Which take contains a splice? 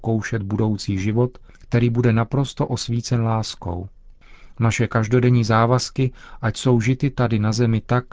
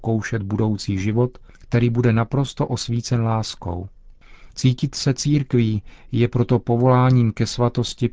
second; 1 cut; at 4.5 s

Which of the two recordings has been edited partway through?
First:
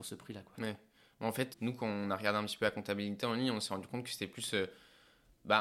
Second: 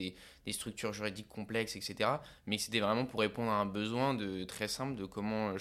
first; 1 cut; at 1.5 s

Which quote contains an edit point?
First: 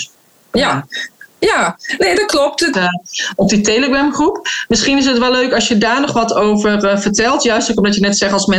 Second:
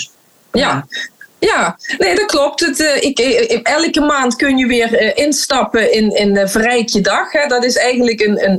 first; 1 cut; at 2.7 s

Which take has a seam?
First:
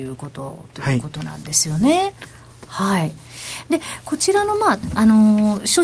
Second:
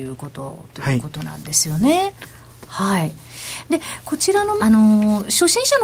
second; 1 cut; at 4.6 s

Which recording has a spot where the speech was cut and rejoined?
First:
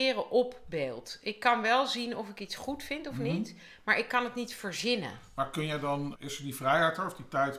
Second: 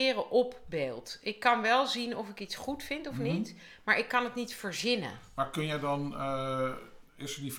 first; 1 cut; at 6.1 s

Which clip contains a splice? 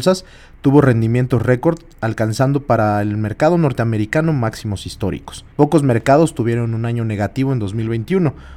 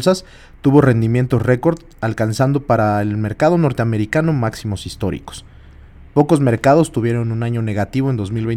first; 1 cut; at 5.5 s

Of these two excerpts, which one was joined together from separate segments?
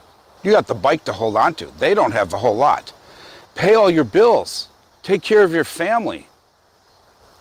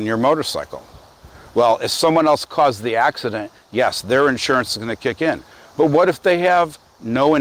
first; 1 cut; at 3.5 s

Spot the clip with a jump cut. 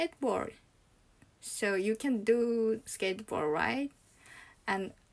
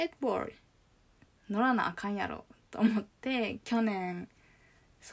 second; 1 cut; at 1.2 s

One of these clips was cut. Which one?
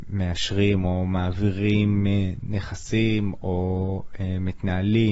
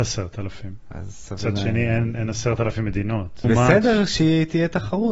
second; 1 cut; at 3.4 s

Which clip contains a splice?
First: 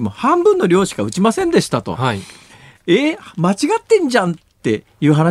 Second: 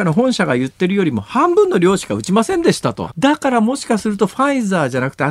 second; 1 cut; at 3.1 s

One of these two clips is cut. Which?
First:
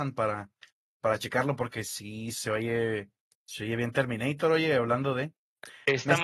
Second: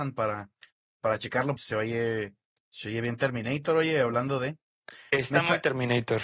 second; 1 cut; at 1.6 s

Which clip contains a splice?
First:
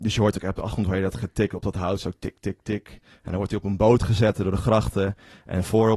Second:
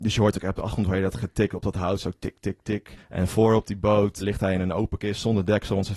second; 2 cuts; at 3.0 s, 4.2 s

